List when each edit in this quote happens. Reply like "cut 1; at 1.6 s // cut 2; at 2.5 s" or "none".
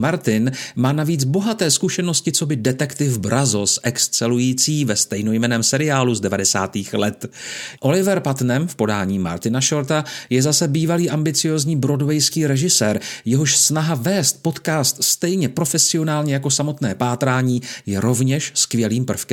cut 1; at 7.8 s